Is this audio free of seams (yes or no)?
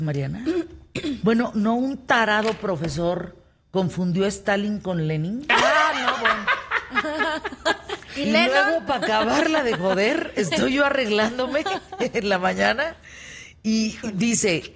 yes